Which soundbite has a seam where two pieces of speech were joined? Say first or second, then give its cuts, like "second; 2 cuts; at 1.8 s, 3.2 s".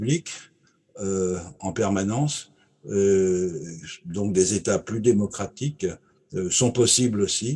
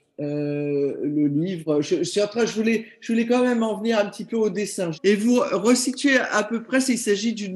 second; 1 cut; at 4.9 s